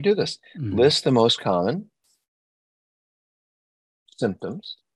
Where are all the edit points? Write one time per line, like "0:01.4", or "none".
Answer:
none